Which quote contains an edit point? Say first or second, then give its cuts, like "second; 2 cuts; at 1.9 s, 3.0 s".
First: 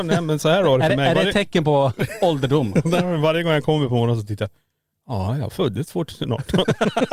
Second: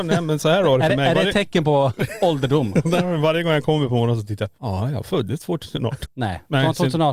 second; 2 cuts; at 4.6 s, 6.1 s